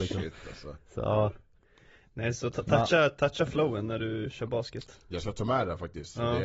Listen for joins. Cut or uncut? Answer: uncut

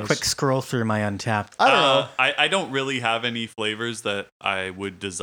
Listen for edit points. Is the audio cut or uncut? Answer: cut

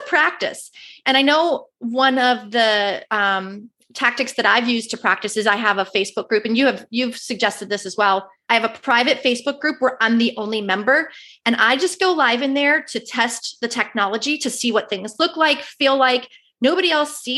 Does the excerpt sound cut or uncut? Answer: uncut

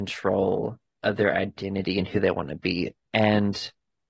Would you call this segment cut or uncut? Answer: cut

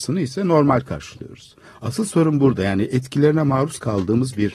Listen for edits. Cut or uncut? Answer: uncut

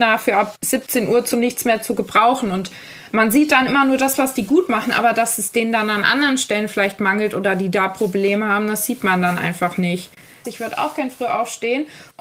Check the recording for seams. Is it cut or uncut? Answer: cut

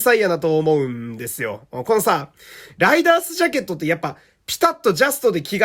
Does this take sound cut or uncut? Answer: uncut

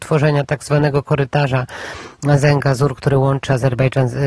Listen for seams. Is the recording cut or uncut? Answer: uncut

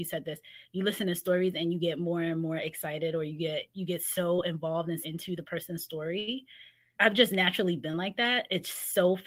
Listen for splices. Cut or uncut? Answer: cut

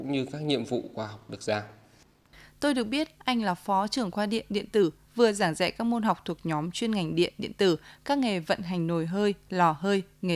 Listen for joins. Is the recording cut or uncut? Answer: cut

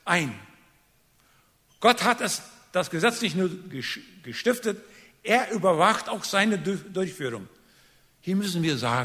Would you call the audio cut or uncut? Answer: uncut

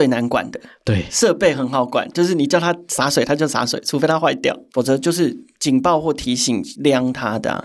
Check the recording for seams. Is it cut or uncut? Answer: cut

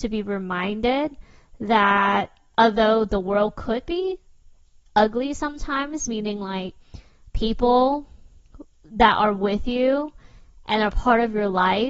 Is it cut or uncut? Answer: uncut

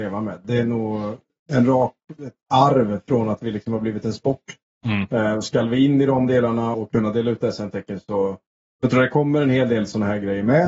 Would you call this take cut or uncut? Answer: cut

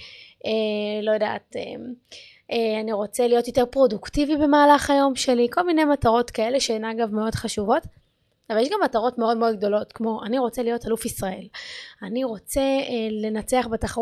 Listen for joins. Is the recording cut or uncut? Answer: uncut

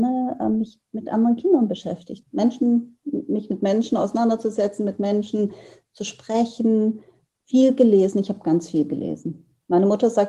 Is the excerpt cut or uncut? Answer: cut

